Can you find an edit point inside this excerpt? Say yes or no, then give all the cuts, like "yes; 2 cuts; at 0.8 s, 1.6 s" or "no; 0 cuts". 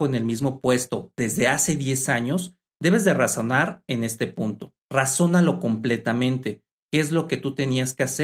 yes; 2 cuts; at 4.8 s, 6.8 s